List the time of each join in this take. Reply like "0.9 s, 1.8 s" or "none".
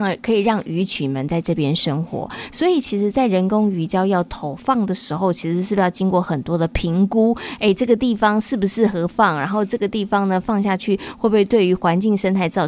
none